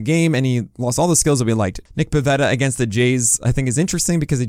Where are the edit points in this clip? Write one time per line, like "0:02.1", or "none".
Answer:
0:01.9